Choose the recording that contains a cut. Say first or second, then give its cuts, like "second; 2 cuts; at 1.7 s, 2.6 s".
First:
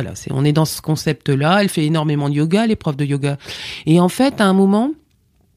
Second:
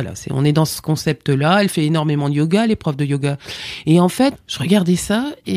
second; 1 cut; at 4.3 s